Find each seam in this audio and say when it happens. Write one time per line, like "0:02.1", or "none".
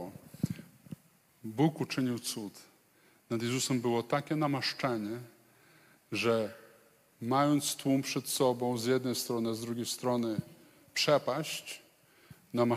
none